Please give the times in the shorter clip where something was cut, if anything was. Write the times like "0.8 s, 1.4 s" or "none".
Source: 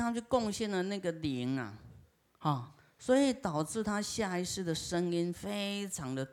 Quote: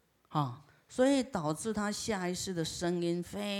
none

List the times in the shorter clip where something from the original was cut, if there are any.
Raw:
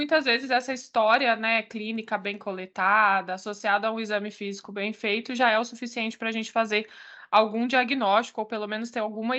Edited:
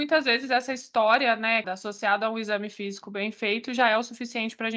1.6 s

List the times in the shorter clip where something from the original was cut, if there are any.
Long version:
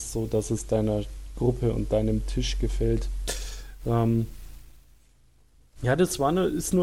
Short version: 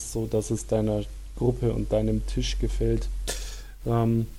none

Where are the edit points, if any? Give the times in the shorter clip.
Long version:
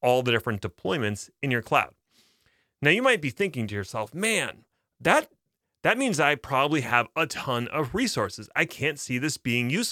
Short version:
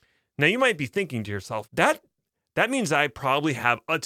1.7 s

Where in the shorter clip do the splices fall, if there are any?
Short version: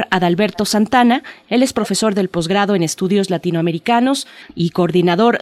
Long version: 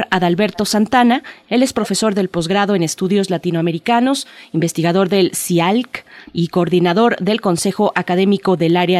4.4 s

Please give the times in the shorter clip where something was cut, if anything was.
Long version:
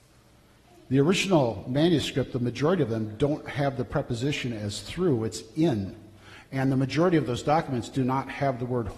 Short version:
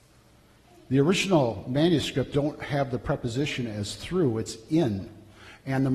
2.3 s

